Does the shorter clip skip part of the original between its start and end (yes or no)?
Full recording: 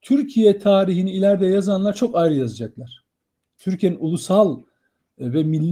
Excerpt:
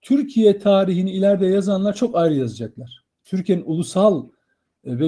yes